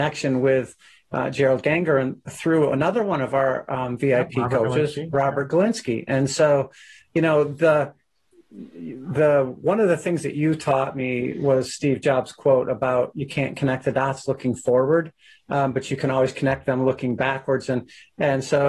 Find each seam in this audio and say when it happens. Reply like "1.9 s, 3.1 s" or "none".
none